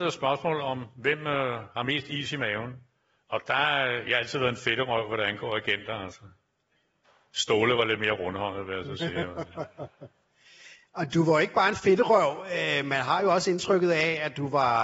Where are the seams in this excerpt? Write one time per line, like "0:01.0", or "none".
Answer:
none